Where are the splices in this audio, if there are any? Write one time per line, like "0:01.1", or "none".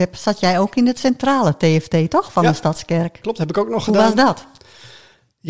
none